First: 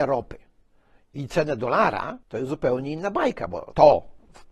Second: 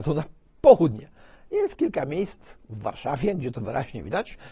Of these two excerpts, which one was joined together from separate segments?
first; 1 cut; at 2.2 s

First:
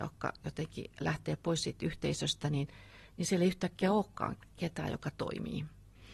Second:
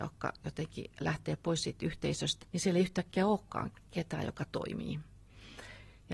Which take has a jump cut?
second; 1 cut; at 2.4 s

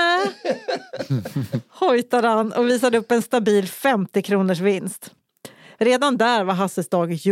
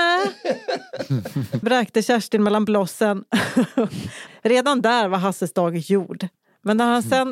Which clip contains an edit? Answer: second; 2 cuts; at 1.6 s, 4.3 s

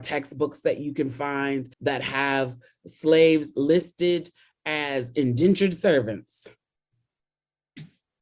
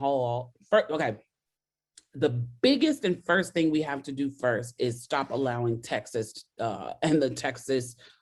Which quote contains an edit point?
first; 1 cut; at 1.7 s

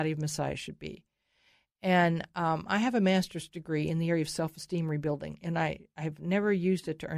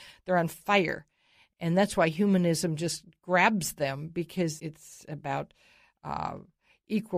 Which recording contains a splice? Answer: second; 1 cut; at 4.6 s

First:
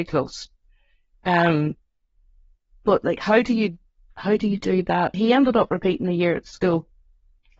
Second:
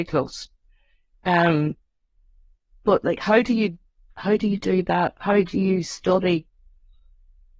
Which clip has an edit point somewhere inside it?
first; 1 cut; at 5.1 s

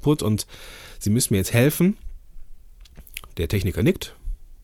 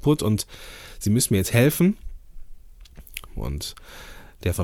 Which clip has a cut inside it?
second; 1 cut; at 3.3 s

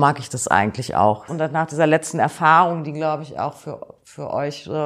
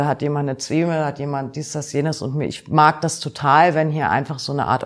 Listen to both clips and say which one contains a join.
first; 1 cut; at 1.3 s

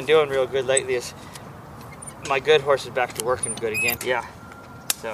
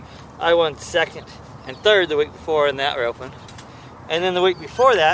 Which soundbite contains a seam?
first; 1 cut; at 4.0 s

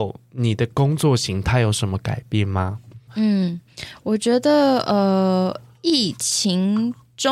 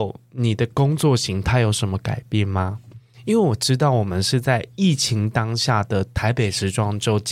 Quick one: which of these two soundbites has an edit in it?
first; 1 cut; at 3.1 s

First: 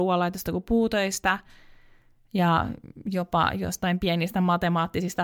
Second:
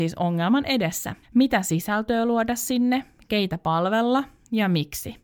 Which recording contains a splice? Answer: second; 1 cut; at 1.2 s

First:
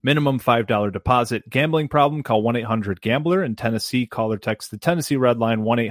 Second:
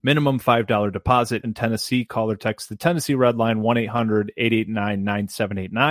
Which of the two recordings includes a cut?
second; 1 cut; at 1.4 s

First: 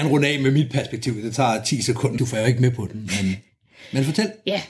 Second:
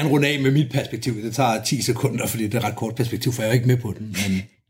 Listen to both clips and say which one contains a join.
first; 1 cut; at 2.2 s

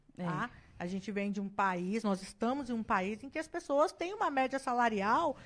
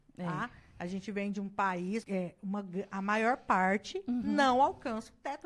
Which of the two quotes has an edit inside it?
second; 1 cut; at 2.0 s

